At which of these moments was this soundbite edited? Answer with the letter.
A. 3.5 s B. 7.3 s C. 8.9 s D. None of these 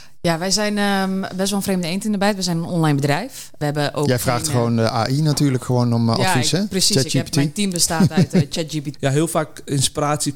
C